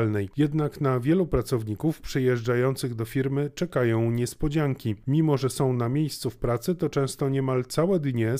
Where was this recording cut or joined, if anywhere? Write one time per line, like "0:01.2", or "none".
none